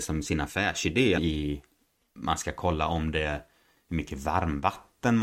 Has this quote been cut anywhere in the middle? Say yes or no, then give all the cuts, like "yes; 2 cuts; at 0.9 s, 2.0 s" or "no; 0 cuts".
yes; 1 cut; at 1.2 s